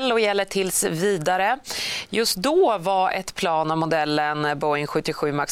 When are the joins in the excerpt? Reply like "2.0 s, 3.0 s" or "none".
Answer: none